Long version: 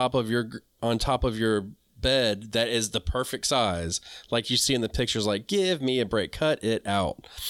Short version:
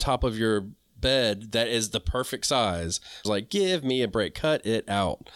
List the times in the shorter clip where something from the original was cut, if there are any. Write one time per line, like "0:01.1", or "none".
0:03.2

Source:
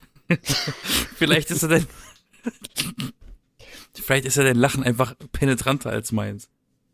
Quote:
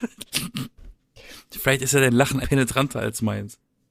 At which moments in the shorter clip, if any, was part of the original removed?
0:02.4

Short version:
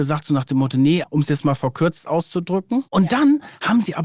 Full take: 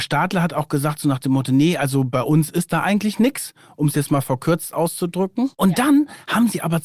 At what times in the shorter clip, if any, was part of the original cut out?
0:01.0

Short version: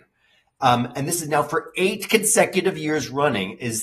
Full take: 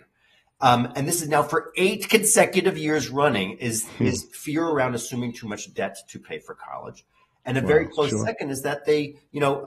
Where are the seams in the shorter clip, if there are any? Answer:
none

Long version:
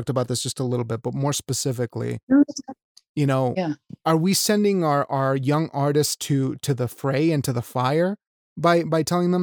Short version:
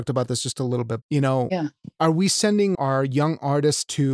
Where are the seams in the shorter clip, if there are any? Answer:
0:01.0
0:02.7

